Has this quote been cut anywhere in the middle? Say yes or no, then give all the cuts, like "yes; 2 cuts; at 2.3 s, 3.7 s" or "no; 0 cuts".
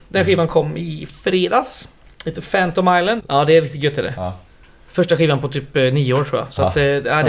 yes; 1 cut; at 3.2 s